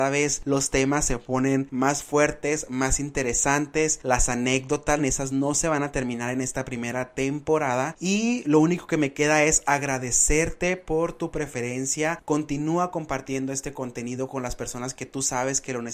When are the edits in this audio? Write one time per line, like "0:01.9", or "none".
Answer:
0:05.0